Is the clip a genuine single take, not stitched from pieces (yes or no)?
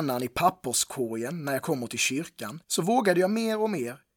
no